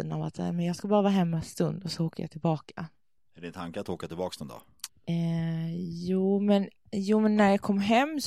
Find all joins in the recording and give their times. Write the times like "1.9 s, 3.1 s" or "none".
3.2 s, 4.9 s